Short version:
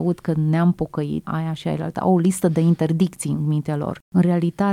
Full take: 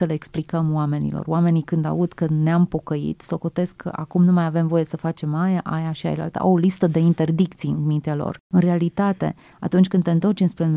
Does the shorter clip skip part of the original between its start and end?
yes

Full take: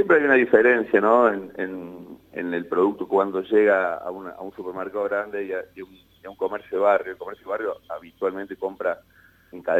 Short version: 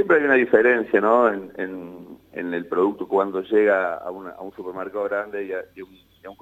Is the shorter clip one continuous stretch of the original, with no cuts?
yes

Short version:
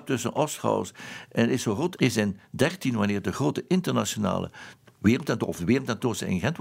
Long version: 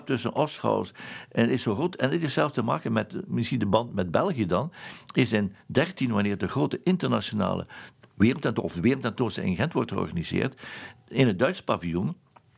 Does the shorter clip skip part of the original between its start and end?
yes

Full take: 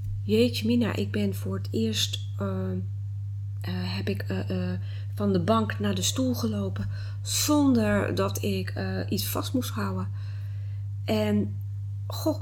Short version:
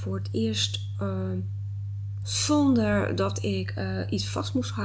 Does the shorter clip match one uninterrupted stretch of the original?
no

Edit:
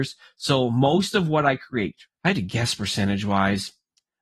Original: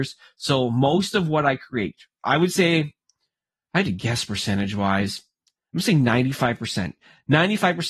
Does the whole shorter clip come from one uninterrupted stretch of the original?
no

